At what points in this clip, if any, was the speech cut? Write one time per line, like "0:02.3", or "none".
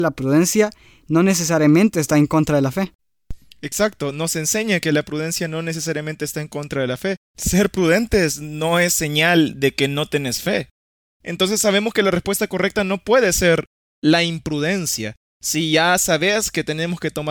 0:07.2

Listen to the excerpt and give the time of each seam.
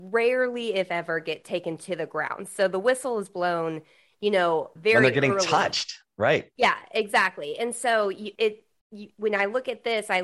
0:04.8
0:08.3

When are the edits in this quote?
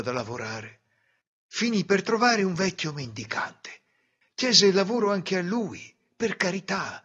none

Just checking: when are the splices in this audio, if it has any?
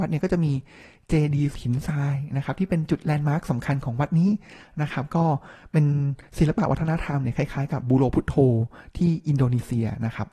0:07.8

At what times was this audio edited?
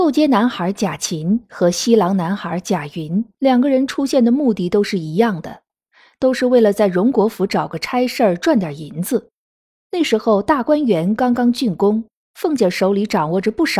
none

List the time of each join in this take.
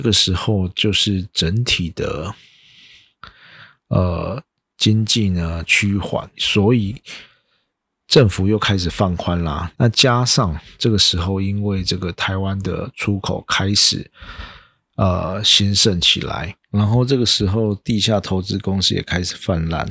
0:06.3
0:09.7

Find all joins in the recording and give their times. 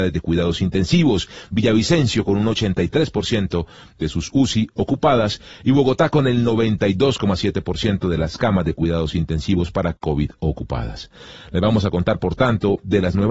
none

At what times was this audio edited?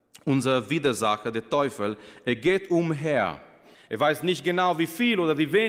0:03.7

